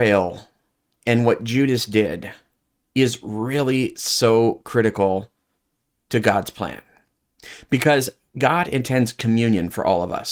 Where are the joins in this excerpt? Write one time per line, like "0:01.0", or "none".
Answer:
none